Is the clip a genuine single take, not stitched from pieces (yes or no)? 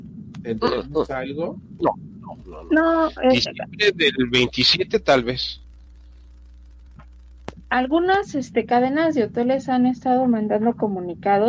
yes